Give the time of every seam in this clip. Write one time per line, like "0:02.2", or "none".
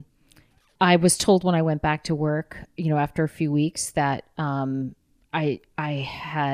none